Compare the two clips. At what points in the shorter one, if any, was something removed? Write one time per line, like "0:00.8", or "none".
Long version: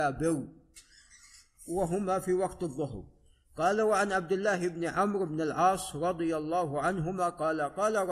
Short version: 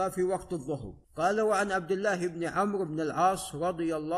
0:01.0